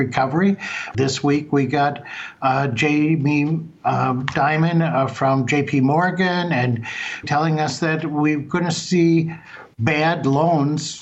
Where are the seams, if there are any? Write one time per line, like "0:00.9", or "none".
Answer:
0:00.9
0:07.2